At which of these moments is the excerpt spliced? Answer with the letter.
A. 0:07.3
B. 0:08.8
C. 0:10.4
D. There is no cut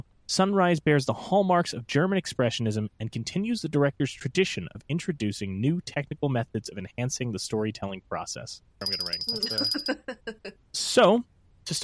B